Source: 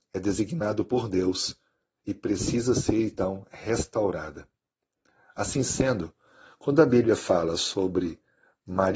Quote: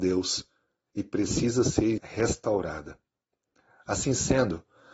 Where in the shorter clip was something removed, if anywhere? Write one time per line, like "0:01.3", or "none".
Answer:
0:02.0

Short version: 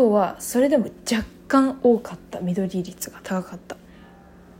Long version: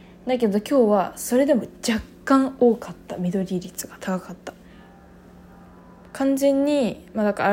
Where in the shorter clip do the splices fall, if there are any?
none

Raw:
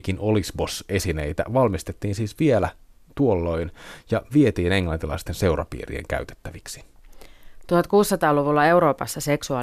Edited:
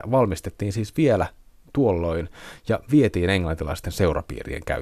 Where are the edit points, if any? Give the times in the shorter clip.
none

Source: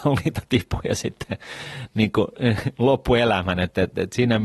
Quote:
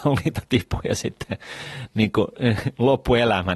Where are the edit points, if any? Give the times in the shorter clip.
none

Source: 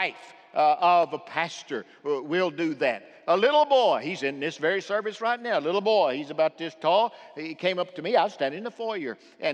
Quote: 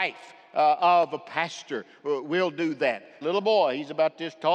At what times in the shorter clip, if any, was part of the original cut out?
0:03.2

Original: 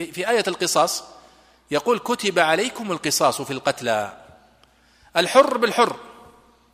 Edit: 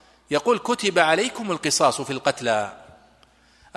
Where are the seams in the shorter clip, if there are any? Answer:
none

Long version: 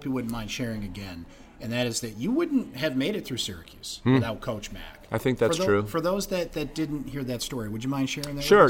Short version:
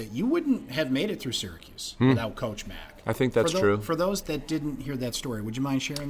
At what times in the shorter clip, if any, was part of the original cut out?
0:04.2

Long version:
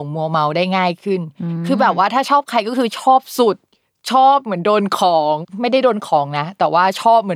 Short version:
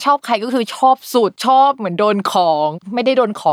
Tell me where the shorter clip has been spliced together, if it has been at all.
0:01.4

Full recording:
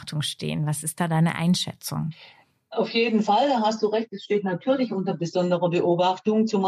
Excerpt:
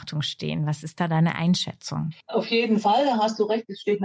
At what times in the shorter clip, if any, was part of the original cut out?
0:02.2

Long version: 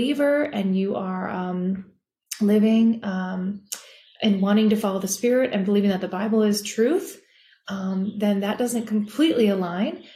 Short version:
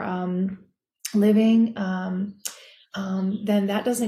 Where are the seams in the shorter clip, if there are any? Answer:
0:02.8

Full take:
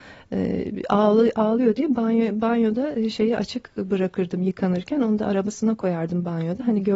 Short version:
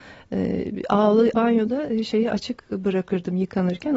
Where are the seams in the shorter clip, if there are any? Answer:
0:01.3

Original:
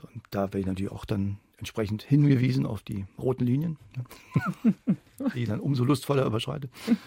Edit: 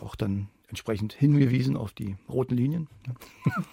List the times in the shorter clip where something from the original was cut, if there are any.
none

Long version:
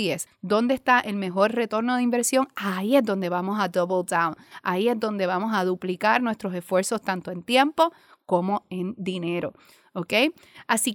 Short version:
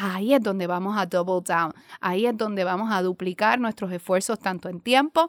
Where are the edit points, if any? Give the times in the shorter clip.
none

